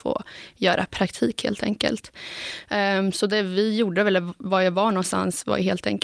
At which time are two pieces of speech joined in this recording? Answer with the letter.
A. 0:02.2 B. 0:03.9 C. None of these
C